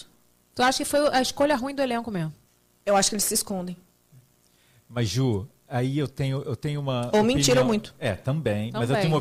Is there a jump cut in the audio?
no; 0 cuts

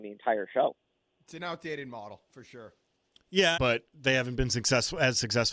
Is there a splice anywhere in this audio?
yes; 1 cut; at 3.6 s

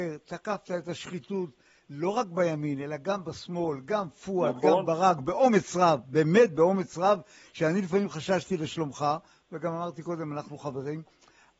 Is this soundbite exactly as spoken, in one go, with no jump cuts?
yes; 0 cuts

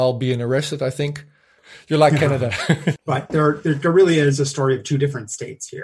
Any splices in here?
yes; 2 cuts; at 1.6 s, 3.0 s

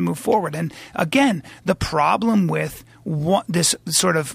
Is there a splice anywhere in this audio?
no; 0 cuts

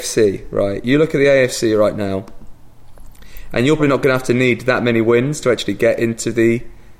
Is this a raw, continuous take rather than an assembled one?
no; 1 cut; at 3.8 s

